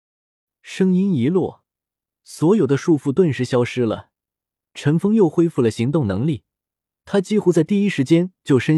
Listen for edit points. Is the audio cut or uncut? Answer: uncut